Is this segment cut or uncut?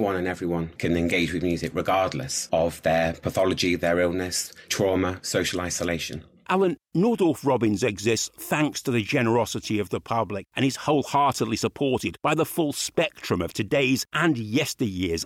cut